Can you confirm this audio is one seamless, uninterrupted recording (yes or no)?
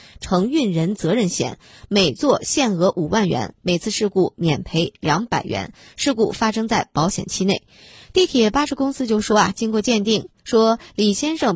yes